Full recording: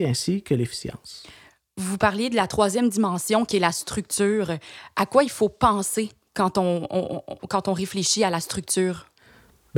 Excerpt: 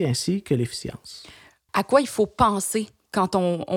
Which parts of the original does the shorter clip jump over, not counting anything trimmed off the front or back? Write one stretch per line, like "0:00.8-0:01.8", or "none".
0:01.7-0:04.9